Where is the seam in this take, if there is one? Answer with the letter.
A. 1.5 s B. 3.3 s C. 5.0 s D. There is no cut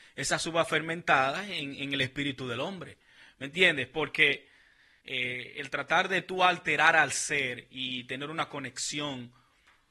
C